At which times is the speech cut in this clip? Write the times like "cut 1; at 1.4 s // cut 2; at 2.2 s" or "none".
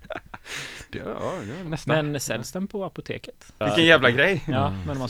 cut 1; at 3.6 s